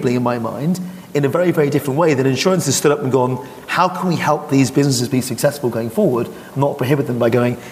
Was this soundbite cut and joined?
no; 0 cuts

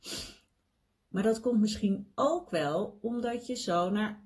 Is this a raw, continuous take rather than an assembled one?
yes; 0 cuts

